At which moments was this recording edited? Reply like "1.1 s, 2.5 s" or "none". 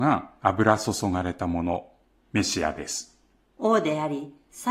none